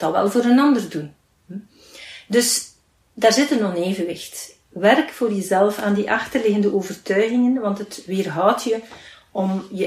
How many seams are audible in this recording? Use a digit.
0